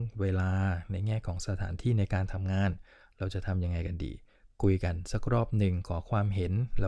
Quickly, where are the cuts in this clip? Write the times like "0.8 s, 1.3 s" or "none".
none

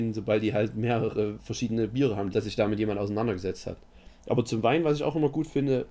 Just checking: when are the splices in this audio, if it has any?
2.3 s

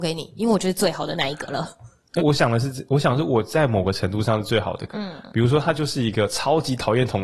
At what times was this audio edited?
2.2 s, 4.9 s

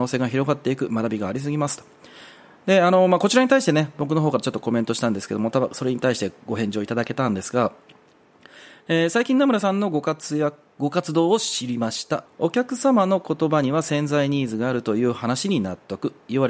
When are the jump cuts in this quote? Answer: 12.3 s

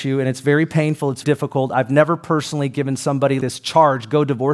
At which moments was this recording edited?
1.2 s, 3.4 s

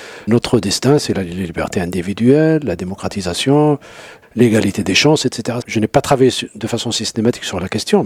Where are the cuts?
5.6 s

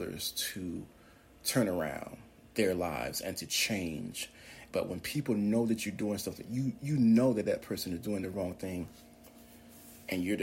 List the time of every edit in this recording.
4.7 s

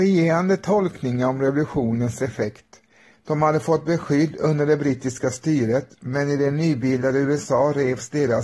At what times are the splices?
3.1 s

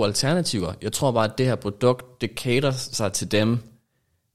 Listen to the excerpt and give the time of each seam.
none

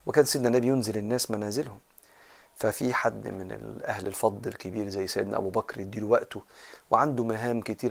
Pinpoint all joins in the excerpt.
none

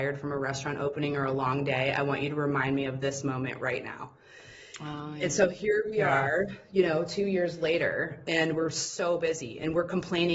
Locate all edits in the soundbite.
none

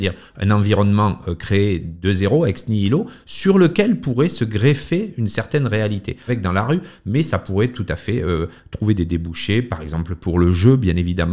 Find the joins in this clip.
6.3 s

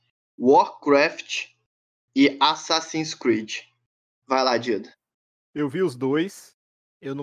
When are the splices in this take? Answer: none

